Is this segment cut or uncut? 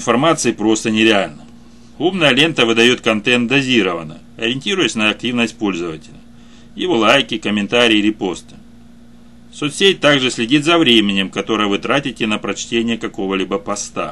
uncut